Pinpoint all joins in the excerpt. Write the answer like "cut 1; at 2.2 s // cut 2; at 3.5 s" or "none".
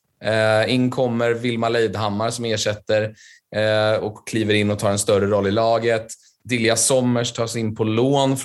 none